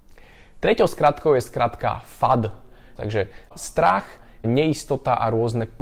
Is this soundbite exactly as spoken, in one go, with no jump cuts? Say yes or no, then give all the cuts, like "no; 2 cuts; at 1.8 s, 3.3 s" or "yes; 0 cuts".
no; 1 cut; at 3.0 s